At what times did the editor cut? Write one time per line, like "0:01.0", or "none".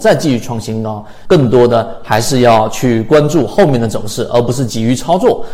0:01.3